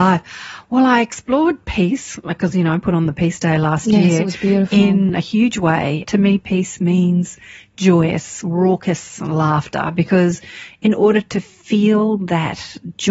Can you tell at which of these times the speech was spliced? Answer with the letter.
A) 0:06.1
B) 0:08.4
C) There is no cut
A